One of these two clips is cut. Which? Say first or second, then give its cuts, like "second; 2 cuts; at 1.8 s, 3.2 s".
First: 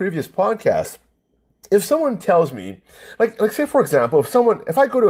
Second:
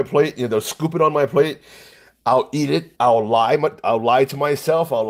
second; 1 cut; at 2.9 s